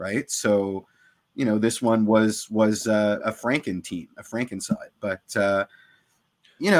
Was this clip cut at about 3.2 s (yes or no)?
yes